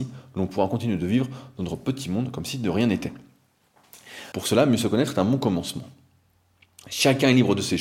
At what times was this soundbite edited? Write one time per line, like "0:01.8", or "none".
0:04.3

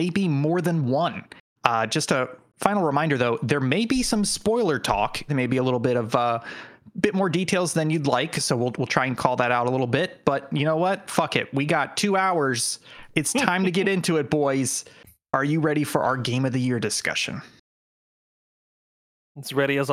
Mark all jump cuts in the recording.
0:01.6
0:05.3

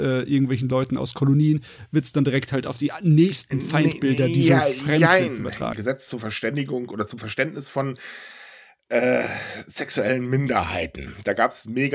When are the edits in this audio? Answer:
0:05.7

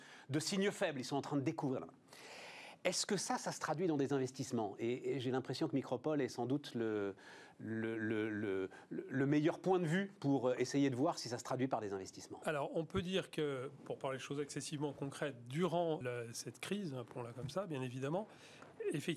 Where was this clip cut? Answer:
0:16.0

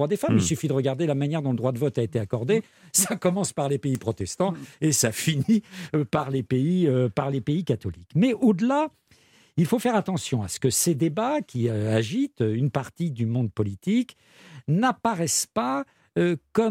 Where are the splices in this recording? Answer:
none

